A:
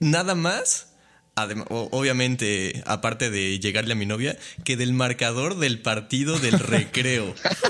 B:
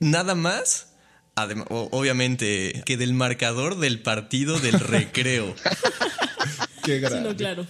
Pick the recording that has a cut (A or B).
B